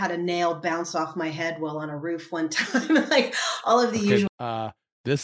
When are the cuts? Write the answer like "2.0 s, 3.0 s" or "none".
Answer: 4.3 s